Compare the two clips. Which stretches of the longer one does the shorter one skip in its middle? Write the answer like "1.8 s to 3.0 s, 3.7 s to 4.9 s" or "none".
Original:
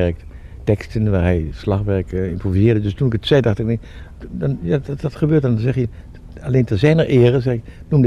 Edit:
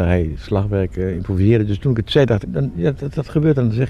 3.6 s to 4.3 s

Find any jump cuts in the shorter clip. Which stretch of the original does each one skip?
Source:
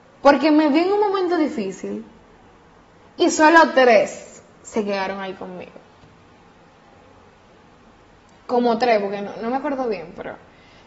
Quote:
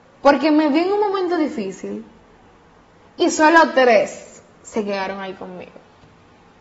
none

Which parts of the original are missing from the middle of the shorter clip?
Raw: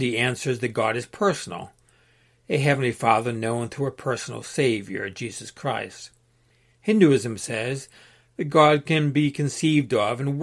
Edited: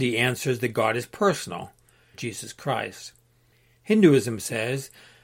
2.1 s to 5.1 s

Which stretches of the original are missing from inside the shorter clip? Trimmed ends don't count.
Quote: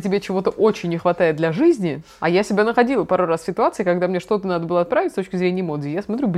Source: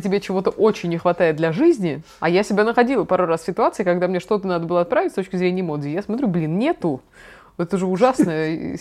none

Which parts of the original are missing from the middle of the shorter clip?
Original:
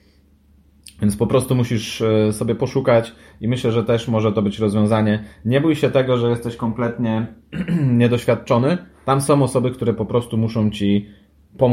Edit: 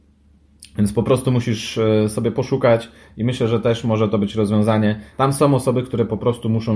5.4 s to 9.0 s

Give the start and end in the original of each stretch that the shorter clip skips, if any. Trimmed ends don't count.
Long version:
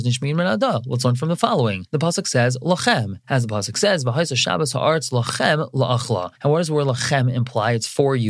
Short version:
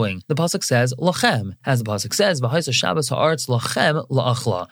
none

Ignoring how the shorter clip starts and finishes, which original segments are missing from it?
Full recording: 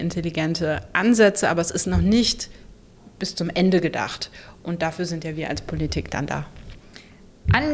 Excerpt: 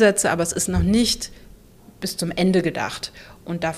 none

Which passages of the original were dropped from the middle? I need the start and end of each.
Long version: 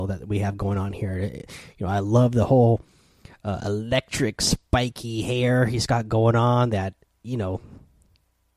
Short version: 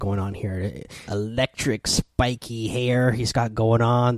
1.6 s to 3.6 s

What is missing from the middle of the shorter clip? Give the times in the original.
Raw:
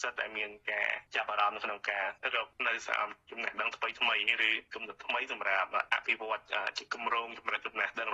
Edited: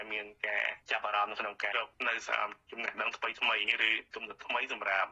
2.0 s to 2.3 s

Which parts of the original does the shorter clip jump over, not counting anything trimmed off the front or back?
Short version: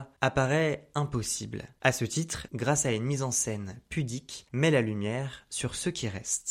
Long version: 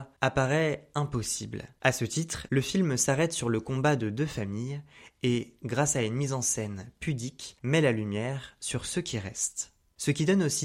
2.5 s to 5.6 s

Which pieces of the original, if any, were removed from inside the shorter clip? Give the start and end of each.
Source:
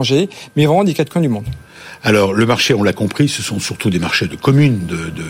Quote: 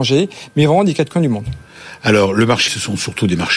2.7 s to 3.3 s

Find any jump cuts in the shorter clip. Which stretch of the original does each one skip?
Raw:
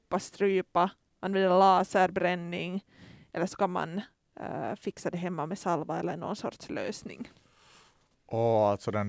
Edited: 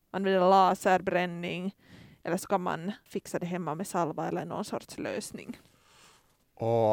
4.1 s to 4.8 s

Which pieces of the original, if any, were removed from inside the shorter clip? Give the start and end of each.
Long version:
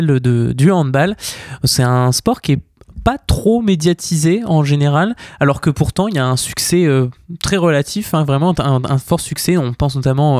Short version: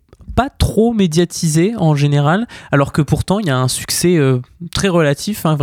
none

